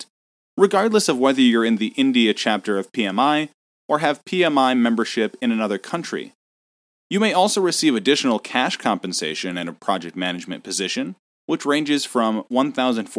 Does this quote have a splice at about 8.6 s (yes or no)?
no